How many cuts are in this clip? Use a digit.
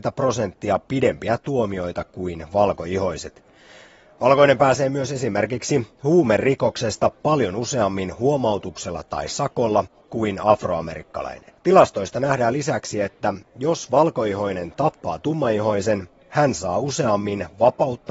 1